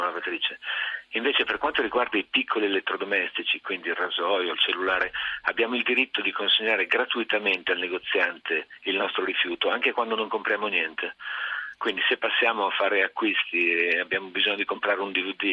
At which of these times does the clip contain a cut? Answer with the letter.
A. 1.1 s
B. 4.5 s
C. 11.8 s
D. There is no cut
B